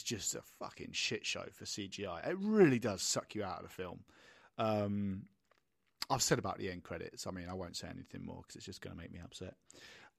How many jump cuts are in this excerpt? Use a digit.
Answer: 0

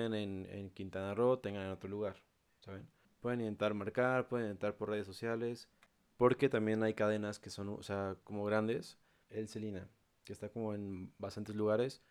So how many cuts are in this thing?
2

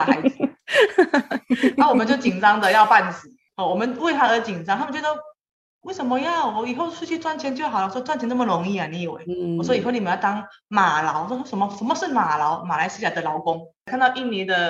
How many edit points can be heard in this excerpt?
0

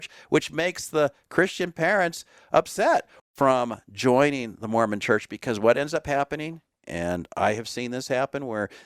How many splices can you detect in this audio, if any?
1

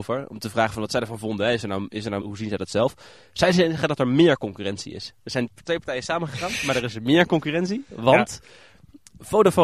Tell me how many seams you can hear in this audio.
1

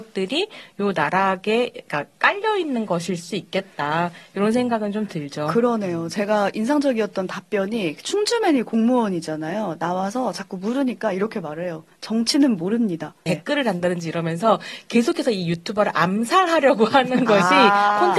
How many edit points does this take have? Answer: 1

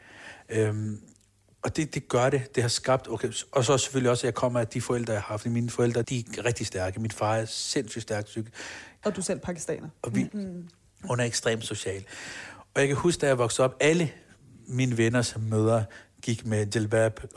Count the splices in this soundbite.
3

